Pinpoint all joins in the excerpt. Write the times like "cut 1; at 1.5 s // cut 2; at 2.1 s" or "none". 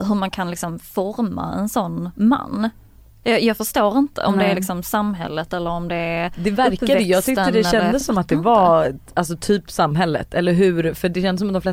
none